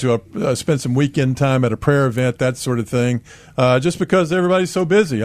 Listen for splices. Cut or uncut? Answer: uncut